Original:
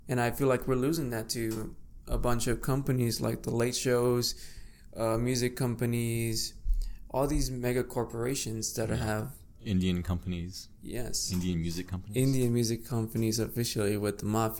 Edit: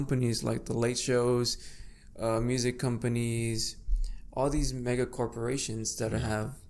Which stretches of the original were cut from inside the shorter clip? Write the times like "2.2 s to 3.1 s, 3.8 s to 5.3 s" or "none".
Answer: none